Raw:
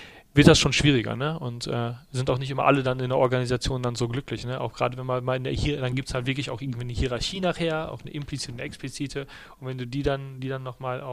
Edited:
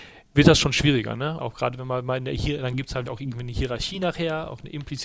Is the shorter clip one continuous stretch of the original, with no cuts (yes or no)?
no